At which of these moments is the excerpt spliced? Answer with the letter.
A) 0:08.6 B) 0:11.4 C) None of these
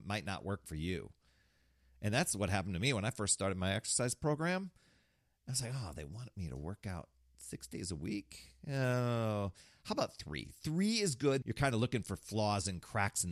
B